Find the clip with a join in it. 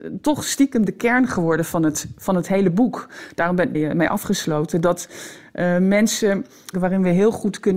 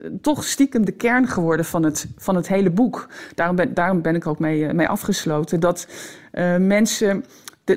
first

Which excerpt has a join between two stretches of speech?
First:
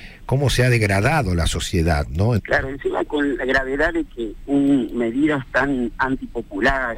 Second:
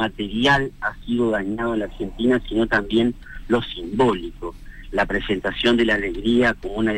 first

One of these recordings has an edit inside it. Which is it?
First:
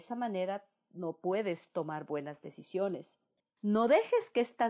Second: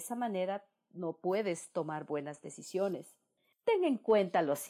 first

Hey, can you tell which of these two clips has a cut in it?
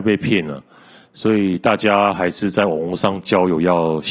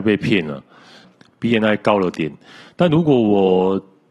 second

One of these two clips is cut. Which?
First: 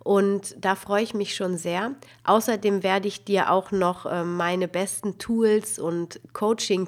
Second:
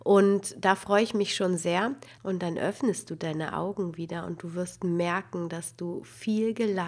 second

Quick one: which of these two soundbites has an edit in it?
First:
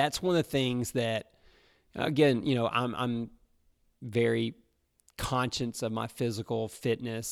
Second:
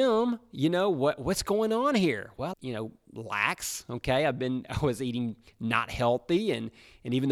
second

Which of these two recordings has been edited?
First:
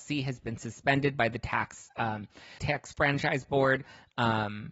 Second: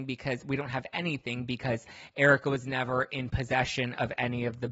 first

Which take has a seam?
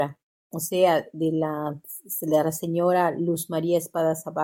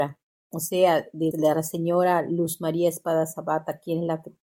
second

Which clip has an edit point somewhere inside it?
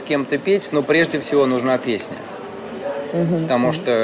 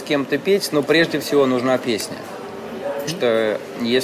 second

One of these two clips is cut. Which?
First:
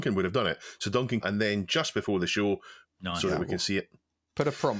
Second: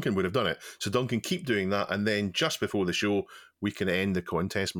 first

